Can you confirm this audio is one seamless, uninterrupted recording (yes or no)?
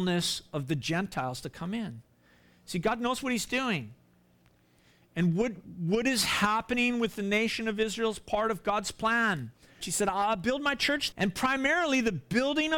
no